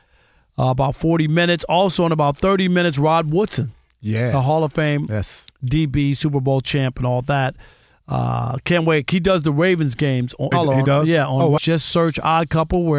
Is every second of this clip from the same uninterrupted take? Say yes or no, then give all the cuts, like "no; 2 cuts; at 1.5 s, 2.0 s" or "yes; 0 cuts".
no; 2 cuts; at 10.5 s, 11.6 s